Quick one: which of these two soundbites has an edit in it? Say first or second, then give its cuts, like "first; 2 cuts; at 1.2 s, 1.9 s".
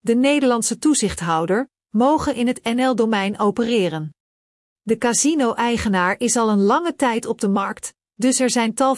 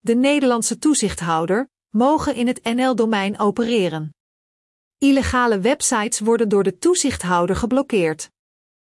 first; 1 cut; at 4.7 s